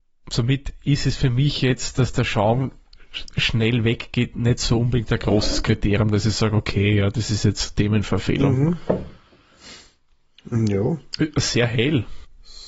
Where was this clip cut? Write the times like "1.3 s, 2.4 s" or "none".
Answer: none